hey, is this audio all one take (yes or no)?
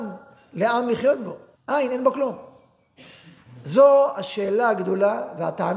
no